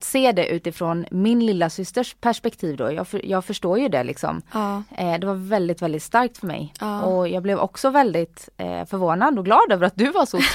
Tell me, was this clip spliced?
no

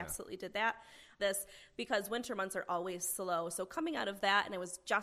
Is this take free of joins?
no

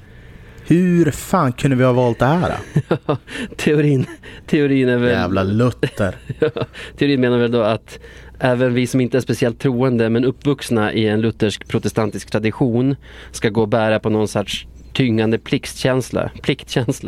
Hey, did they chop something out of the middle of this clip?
no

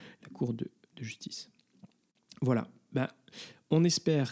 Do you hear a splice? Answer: no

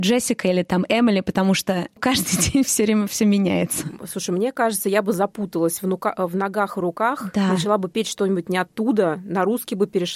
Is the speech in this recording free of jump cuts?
yes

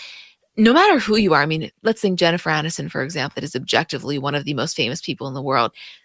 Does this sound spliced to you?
yes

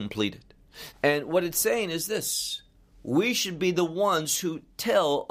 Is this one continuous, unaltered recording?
no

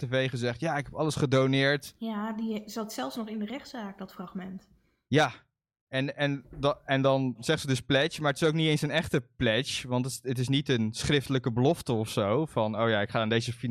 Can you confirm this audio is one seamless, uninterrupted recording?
yes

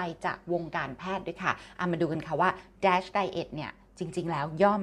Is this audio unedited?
yes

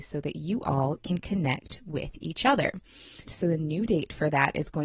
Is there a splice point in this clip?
yes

